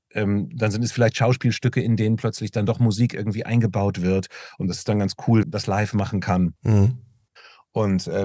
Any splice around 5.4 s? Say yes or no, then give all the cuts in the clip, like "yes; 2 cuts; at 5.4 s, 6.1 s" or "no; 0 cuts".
yes; 1 cut; at 5.4 s